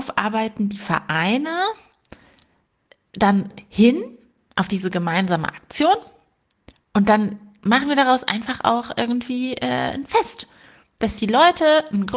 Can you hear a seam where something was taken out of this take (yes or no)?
no